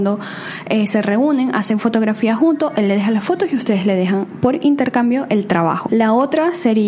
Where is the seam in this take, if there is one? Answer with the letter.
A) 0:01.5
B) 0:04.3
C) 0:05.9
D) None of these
C